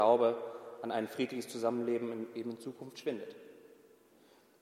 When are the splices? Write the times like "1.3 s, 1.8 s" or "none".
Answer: none